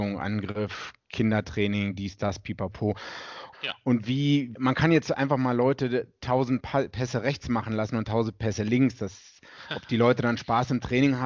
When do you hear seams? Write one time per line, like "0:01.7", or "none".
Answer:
0:03.5
0:04.5